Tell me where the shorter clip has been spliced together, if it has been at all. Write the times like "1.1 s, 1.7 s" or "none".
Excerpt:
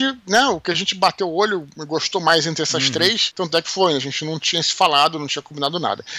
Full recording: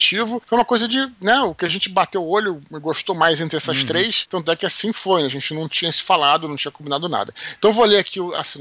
3.6 s